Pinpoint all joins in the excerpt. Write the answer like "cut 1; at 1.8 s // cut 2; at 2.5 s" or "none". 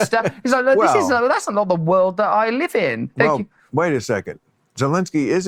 none